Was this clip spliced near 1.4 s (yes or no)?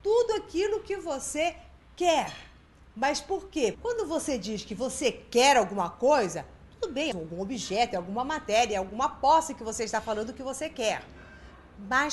no